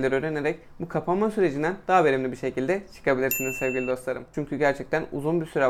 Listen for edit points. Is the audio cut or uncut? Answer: cut